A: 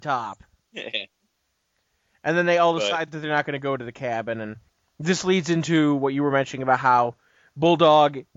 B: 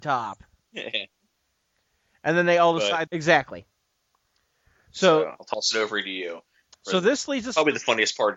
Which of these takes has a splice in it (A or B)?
B